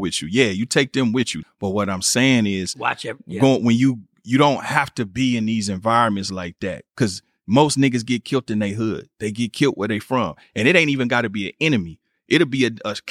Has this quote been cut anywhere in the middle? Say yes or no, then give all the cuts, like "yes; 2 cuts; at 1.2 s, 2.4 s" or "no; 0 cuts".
yes; 1 cut; at 1.4 s